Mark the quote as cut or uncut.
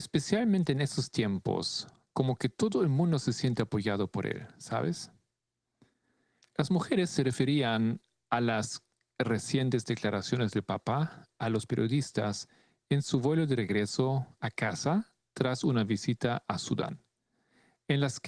uncut